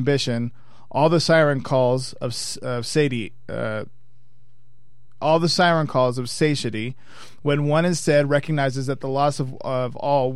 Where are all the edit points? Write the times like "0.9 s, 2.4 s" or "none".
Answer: none

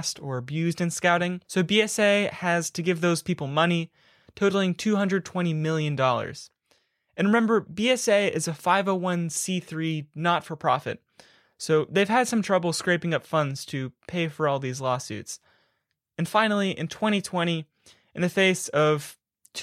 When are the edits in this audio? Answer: 1.4 s

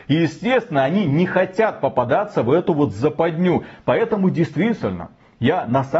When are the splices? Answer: none

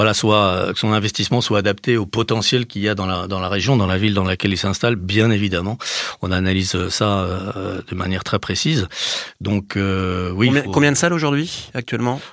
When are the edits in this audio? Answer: none

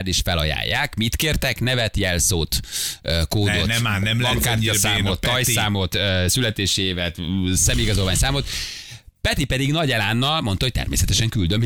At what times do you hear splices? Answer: none

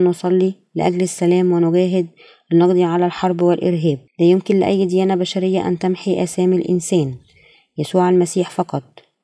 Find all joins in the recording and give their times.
4.1 s

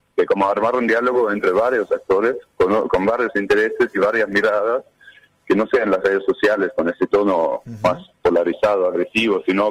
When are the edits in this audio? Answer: none

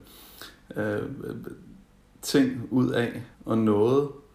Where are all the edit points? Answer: 3.3 s

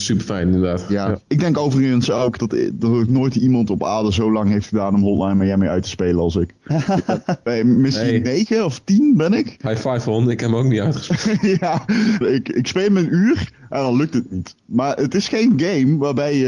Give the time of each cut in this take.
1.2 s, 12.2 s

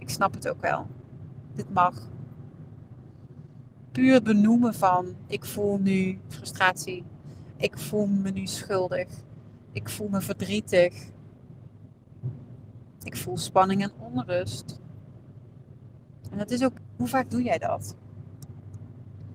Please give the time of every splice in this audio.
16.8 s

